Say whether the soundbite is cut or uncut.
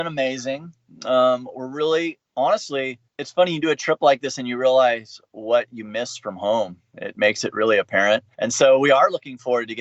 uncut